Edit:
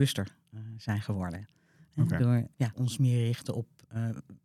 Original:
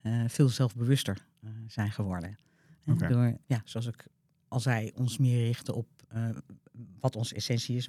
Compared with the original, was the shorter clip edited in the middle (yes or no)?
yes